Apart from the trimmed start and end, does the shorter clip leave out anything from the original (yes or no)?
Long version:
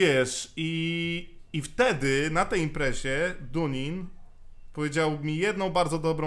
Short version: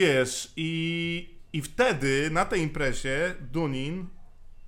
no